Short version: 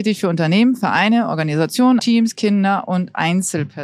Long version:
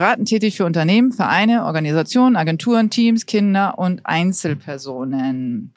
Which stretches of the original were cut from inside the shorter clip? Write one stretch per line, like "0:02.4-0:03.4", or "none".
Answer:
0:02.4-0:02.9